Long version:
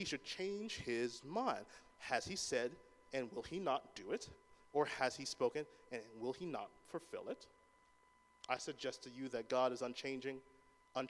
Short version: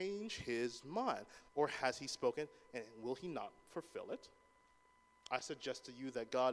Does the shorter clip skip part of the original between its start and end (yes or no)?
yes